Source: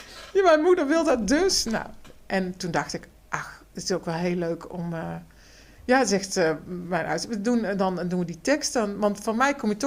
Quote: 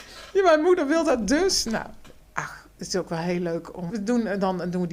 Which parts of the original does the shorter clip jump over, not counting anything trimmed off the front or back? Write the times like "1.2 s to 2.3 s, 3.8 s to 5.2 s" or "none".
2.2 s to 3.2 s, 4.8 s to 7.3 s